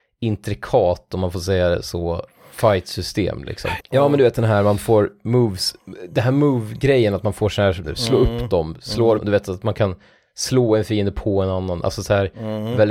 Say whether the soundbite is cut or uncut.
cut